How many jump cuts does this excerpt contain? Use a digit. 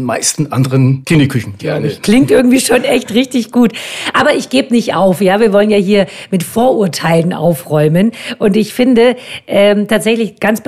1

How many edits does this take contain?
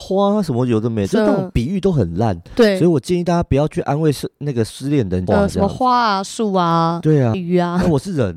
2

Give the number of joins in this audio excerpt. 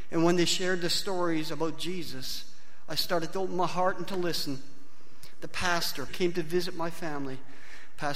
1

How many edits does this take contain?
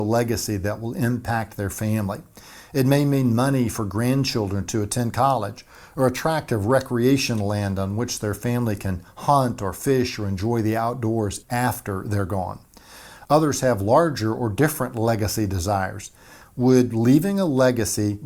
2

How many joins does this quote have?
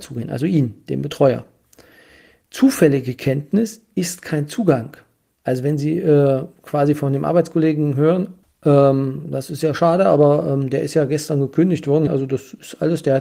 2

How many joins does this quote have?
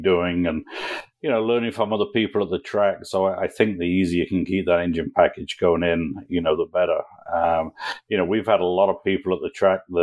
0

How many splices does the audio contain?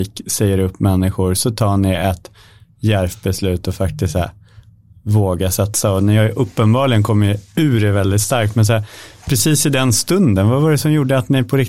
0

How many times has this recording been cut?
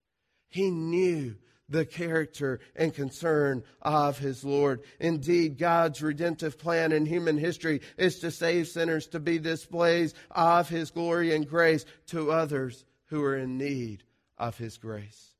0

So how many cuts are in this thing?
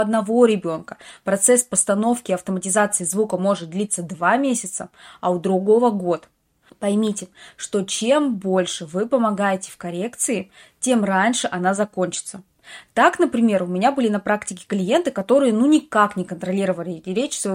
1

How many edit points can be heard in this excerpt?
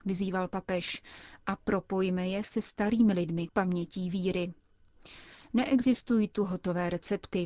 1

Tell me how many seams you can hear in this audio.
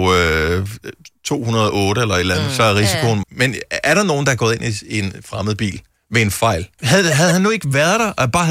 2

